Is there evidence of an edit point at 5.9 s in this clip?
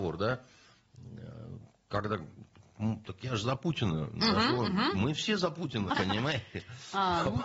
yes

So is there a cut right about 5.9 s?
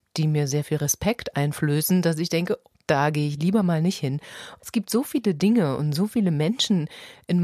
no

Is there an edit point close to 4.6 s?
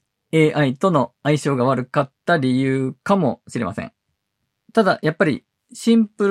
no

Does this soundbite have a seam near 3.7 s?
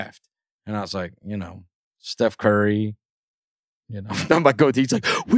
yes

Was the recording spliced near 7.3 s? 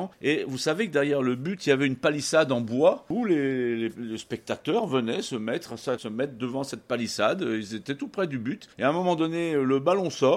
no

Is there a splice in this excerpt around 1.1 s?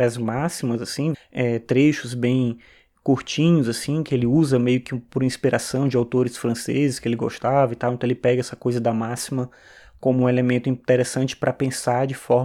yes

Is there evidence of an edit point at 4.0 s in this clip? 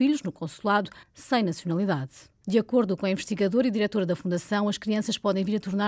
no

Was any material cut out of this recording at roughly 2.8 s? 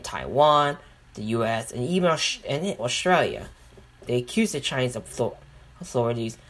yes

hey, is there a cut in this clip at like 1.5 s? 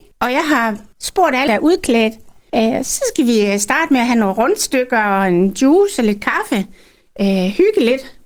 yes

